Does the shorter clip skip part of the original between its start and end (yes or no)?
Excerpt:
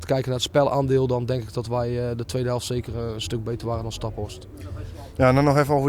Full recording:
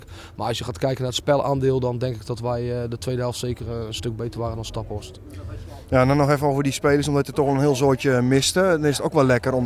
no